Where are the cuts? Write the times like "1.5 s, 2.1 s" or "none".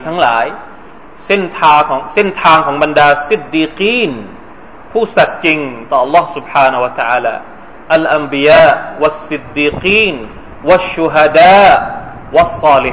none